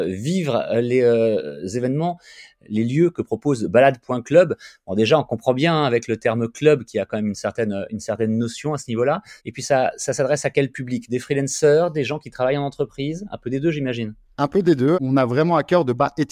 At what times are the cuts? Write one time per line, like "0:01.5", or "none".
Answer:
0:09.4
0:14.9